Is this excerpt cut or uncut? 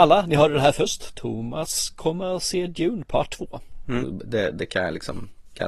cut